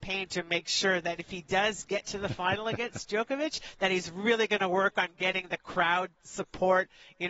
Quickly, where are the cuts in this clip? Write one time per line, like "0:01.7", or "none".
none